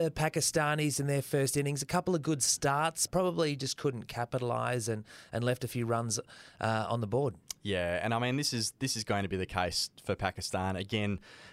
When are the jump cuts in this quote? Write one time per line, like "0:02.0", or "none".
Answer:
0:03.1